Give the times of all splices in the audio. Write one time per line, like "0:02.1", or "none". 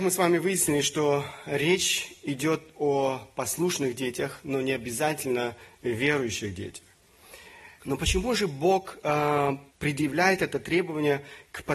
0:07.8
0:09.7